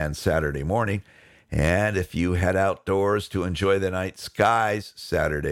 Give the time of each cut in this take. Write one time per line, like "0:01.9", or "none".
none